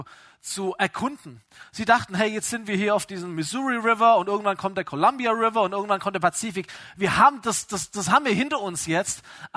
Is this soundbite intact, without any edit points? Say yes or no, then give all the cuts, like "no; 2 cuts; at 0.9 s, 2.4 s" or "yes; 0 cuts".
yes; 0 cuts